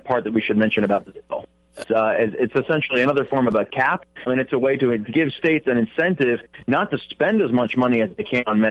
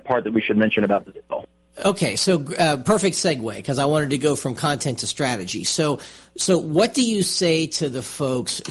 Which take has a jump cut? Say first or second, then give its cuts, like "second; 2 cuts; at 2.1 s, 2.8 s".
first; 2 cuts; at 1.8 s, 4.3 s